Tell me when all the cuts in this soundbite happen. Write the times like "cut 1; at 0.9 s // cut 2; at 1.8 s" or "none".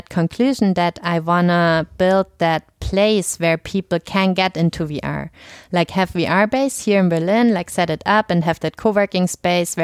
none